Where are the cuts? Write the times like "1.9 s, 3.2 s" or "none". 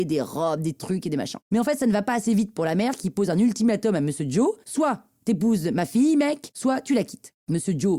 4.6 s